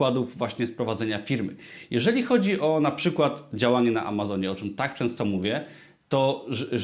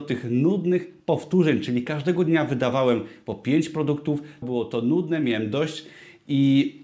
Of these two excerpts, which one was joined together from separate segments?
second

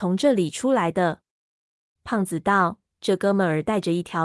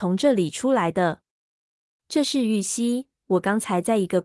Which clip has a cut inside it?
first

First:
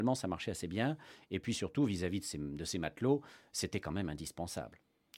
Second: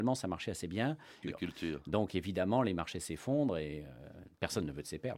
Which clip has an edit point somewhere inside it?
second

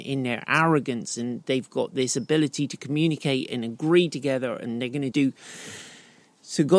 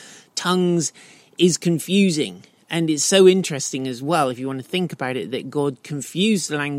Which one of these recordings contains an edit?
first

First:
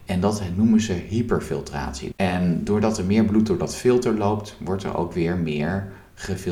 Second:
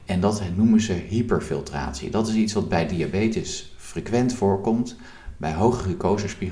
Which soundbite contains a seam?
first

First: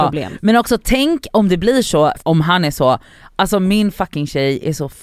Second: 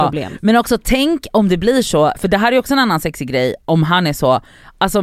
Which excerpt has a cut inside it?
first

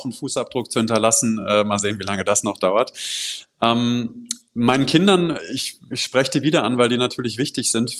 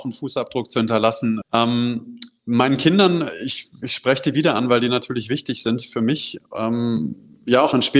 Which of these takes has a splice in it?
second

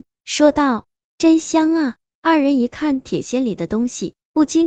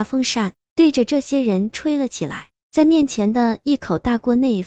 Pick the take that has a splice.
second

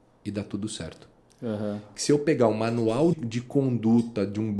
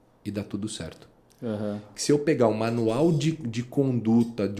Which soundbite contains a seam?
first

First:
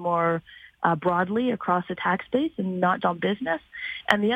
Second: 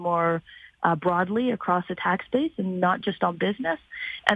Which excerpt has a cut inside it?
first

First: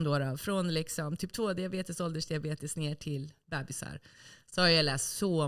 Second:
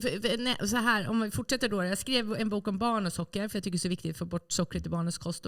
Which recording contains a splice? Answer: first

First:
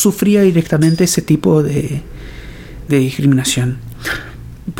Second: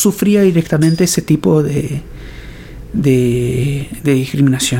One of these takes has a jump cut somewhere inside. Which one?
first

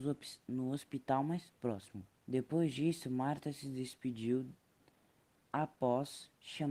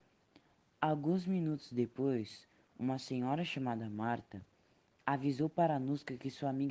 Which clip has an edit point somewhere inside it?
first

